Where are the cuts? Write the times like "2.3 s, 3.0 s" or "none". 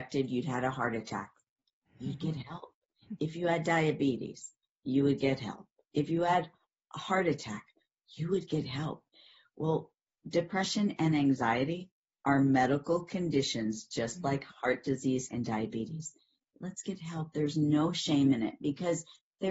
15.3 s